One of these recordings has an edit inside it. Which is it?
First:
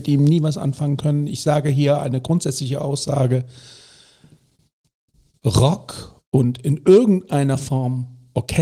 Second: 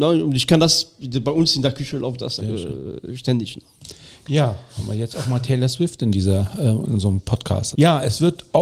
second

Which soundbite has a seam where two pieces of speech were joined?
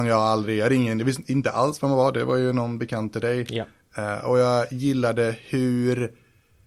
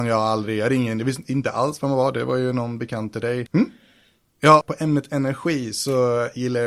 second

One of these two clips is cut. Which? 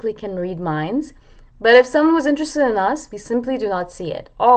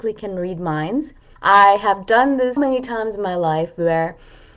second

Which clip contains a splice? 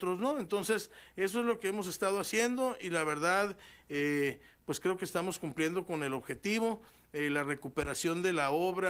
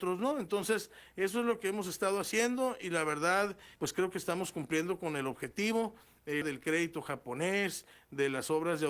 second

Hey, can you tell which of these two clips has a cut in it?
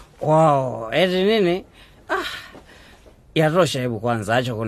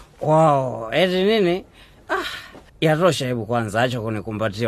second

